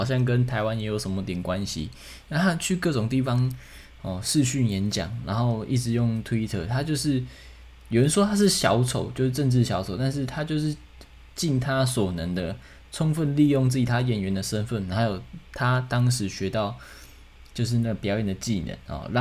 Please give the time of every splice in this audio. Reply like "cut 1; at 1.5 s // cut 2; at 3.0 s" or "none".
none